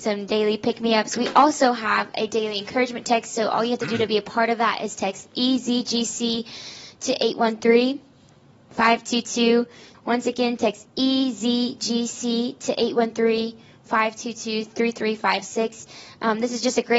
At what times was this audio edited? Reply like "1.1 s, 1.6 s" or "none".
9.9 s

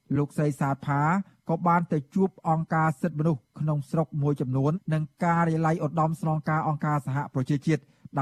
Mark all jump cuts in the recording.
4.7 s

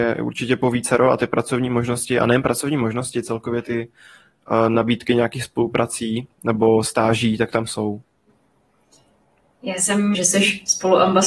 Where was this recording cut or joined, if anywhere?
10.1 s

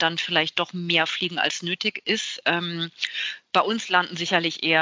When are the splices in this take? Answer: none

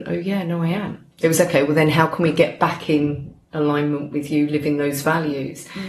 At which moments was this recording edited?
1.1 s, 3.4 s

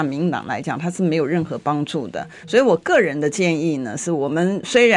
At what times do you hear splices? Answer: none

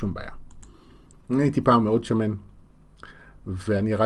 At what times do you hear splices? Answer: 1.1 s

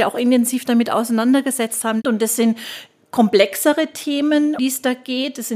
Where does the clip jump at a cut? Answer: 2.0 s, 4.6 s

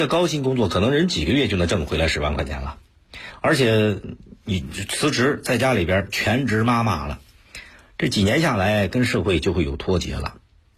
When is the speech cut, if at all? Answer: none

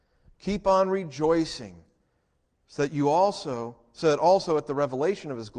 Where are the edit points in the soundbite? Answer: none

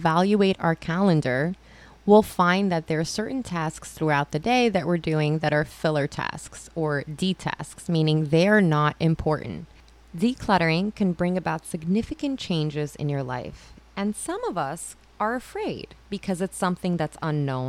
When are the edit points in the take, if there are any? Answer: 10.1 s, 16.0 s

